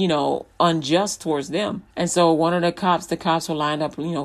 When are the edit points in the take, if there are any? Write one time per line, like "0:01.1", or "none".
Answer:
0:01.9